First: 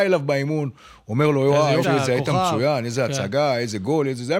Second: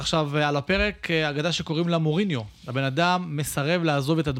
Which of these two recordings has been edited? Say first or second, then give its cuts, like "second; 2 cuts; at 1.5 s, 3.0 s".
first; 1 cut; at 1.8 s